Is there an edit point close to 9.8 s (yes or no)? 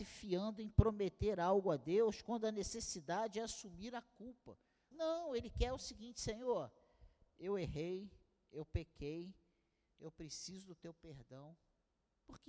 no